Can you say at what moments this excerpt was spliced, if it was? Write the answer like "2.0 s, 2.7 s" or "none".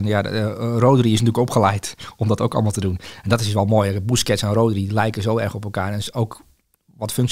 none